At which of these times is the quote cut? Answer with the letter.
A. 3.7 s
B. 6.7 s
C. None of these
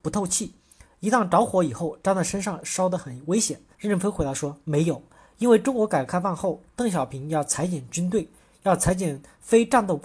A